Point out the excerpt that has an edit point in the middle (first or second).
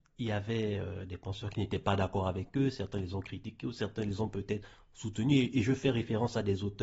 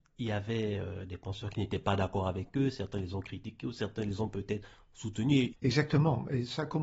second